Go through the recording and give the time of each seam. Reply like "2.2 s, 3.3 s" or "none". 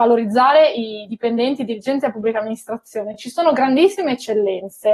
none